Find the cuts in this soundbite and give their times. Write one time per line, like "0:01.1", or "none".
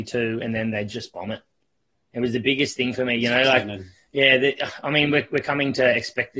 none